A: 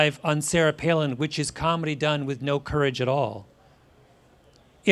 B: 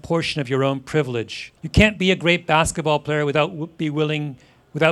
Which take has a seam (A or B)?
B